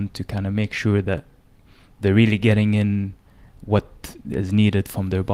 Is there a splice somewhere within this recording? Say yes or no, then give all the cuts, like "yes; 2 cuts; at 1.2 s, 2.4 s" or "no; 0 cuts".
no; 0 cuts